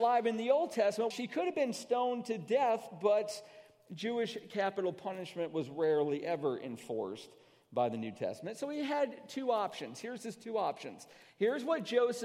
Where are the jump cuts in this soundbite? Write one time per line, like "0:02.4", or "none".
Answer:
0:01.1